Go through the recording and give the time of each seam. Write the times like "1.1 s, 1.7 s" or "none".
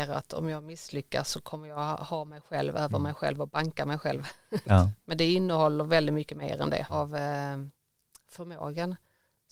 4.6 s, 6.9 s

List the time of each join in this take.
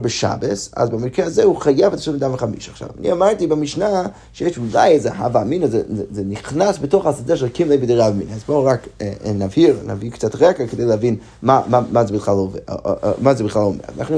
none

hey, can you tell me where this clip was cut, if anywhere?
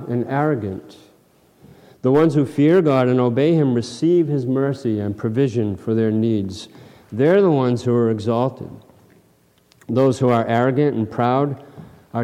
none

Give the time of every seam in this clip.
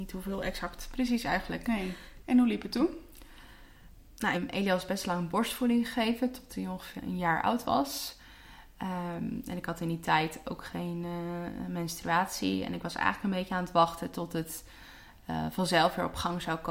2.2 s, 4.3 s, 7.0 s

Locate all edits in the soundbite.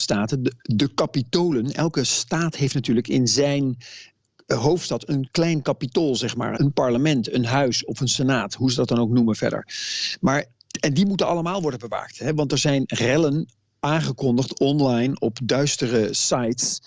6.6 s

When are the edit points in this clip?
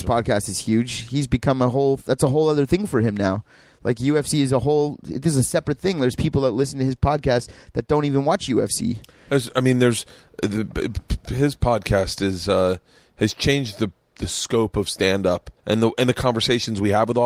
15.6 s

